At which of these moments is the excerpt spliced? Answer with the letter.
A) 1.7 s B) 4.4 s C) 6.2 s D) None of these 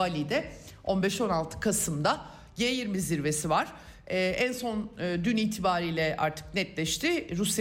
D